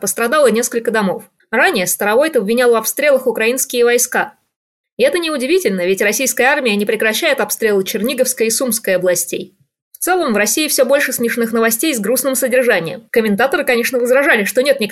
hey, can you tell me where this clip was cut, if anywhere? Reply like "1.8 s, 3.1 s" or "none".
4.8 s, 13.1 s